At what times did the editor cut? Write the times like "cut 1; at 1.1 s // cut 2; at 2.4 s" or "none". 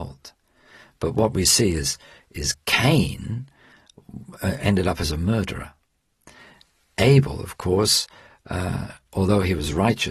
none